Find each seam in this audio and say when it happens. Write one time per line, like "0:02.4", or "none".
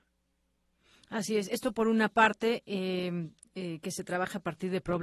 none